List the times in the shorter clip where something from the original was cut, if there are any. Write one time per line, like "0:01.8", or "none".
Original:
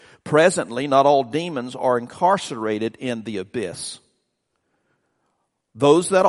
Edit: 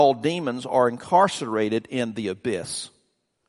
none